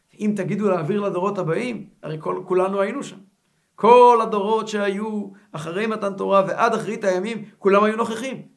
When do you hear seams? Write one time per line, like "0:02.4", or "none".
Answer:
none